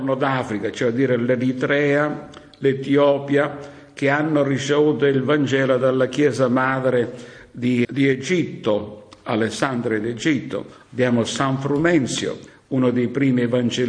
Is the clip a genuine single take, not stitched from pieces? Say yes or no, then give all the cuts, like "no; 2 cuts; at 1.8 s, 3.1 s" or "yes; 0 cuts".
no; 1 cut; at 7.8 s